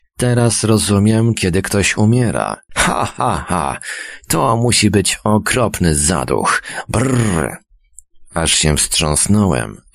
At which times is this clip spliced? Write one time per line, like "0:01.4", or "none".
0:01.4
0:02.7